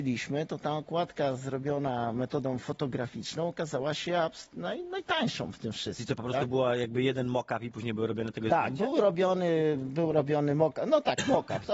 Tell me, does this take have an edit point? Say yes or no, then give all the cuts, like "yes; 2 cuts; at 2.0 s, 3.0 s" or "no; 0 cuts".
no; 0 cuts